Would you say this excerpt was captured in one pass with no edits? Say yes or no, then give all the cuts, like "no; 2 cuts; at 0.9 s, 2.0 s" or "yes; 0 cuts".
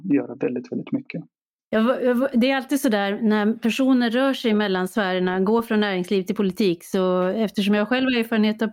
no; 1 cut; at 1.6 s